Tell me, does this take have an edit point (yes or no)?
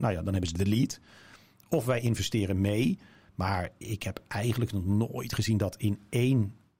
no